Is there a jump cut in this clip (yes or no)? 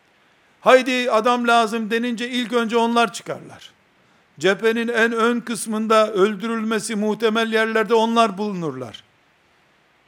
no